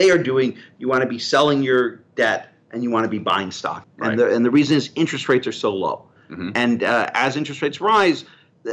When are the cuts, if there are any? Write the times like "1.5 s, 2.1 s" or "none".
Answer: 3.8 s, 6.2 s